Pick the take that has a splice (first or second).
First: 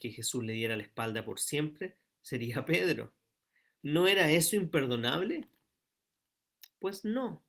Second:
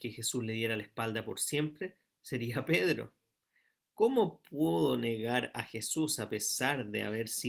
first